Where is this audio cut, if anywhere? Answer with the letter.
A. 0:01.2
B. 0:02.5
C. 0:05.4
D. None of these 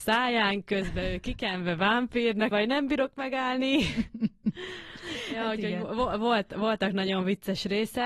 B